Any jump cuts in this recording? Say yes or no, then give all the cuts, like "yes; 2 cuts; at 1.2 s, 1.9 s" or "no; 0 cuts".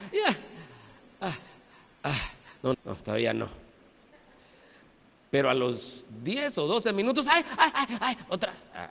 yes; 2 cuts; at 2.7 s, 7.7 s